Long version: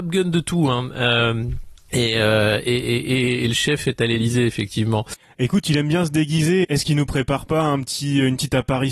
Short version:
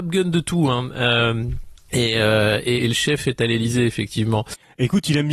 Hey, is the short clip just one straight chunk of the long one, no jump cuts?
no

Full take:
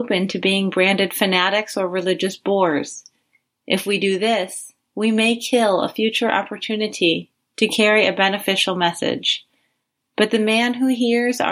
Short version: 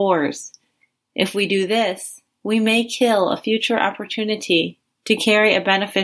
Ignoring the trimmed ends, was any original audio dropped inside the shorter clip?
no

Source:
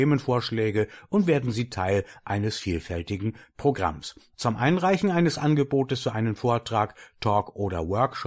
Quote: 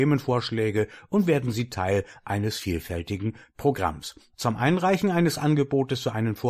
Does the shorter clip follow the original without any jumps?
yes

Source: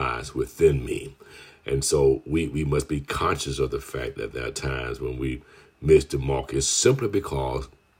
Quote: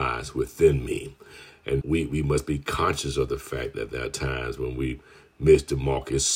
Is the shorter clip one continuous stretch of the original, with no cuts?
no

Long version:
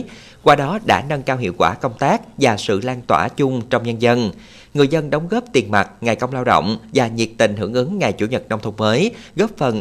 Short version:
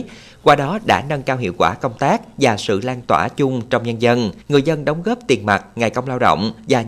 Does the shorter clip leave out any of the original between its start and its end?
yes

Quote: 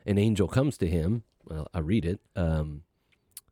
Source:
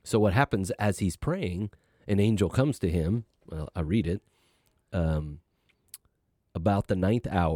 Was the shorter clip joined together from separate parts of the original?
yes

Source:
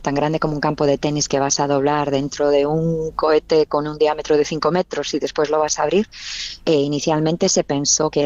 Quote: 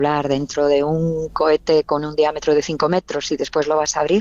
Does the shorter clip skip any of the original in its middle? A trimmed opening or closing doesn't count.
no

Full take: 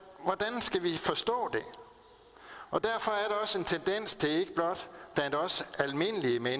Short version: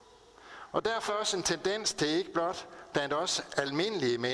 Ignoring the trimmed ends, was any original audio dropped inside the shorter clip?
yes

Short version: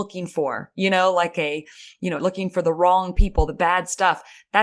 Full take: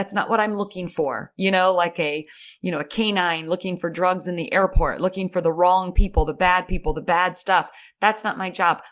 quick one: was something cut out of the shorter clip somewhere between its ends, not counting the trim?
yes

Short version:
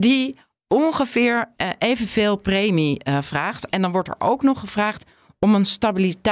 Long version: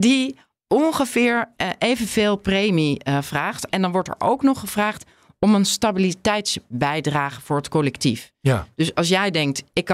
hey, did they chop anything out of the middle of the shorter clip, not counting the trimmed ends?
no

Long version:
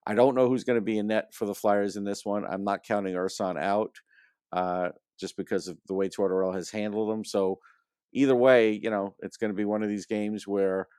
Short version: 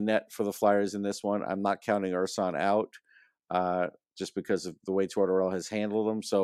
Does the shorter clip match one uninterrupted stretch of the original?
yes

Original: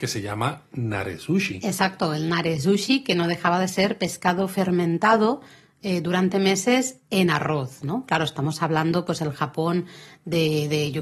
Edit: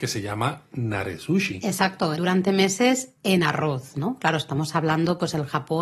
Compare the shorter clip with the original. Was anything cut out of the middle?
yes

